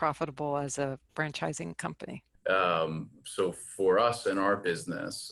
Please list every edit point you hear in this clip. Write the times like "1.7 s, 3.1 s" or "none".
1.1 s, 2.3 s